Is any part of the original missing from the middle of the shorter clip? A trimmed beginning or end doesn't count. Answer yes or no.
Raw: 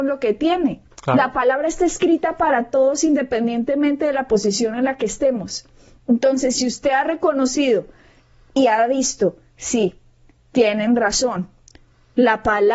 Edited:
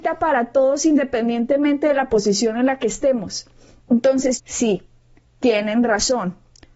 yes